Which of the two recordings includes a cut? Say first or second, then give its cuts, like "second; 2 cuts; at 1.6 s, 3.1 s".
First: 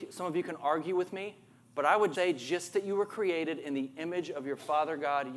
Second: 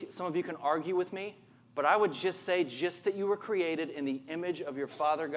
first; 1 cut; at 2.1 s